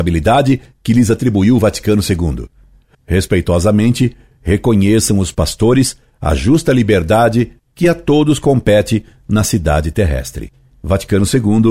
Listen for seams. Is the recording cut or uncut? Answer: cut